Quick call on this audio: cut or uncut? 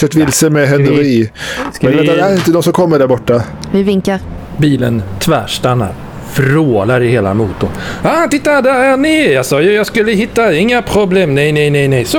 uncut